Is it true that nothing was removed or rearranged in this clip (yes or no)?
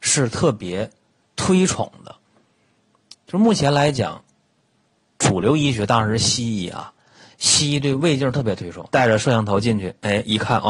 no